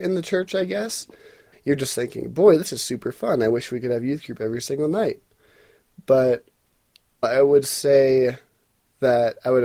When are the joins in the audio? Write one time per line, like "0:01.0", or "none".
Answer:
0:01.5
0:07.2